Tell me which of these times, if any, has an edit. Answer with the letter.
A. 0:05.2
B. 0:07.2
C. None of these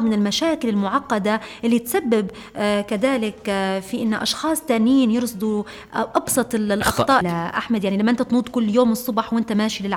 B